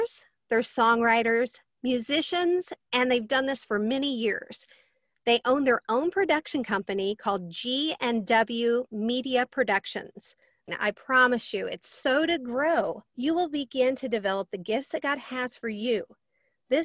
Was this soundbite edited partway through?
yes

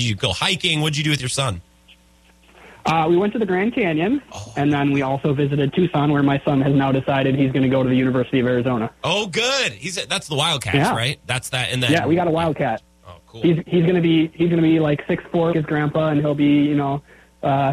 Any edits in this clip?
yes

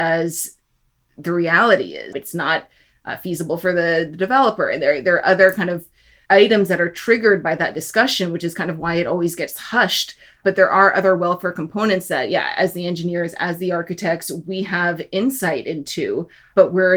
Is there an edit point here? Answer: yes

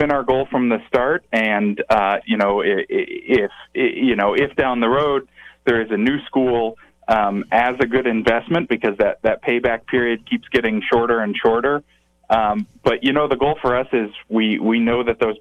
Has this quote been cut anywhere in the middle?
yes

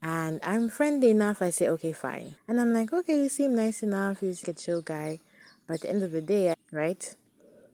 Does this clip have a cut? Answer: yes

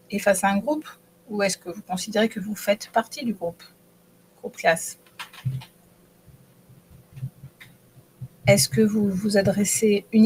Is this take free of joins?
yes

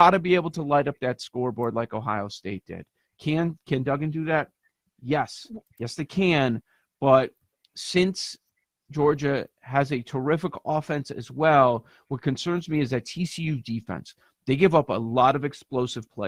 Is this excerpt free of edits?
yes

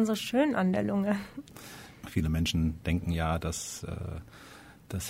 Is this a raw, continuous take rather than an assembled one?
yes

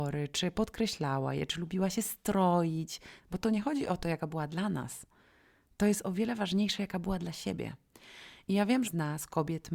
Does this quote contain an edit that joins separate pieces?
yes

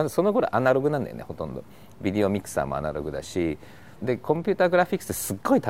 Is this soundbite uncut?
no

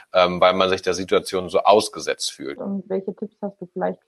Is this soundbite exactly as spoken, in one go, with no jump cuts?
no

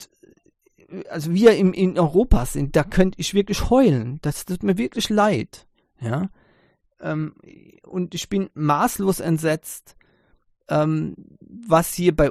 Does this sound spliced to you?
no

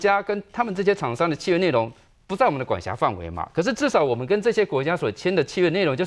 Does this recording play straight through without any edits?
yes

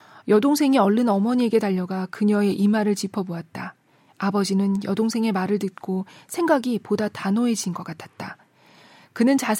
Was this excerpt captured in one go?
yes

